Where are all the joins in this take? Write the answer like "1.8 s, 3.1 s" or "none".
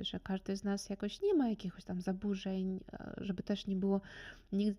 1.2 s